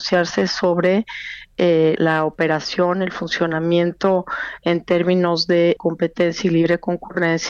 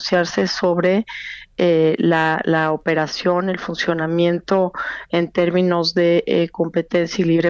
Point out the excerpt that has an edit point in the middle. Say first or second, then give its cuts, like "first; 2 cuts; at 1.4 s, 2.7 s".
first; 2 cuts; at 2.0 s, 5.8 s